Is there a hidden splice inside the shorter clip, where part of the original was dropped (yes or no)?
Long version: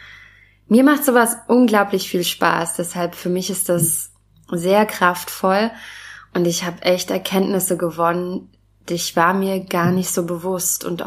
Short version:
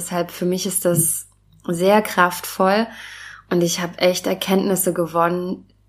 no